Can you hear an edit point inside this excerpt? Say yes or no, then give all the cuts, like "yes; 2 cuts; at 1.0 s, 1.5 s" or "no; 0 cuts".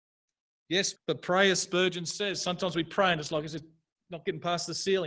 yes; 1 cut; at 0.9 s